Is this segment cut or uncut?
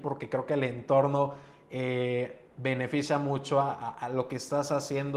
uncut